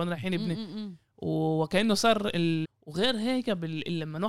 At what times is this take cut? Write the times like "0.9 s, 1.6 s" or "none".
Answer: 2.6 s